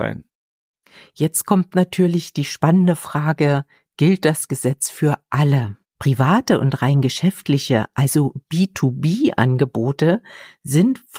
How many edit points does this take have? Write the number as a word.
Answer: one